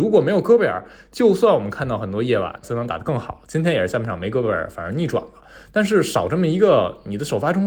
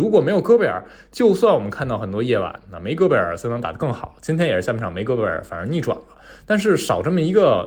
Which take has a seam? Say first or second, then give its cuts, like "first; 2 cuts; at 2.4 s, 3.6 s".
first; 1 cut; at 2.6 s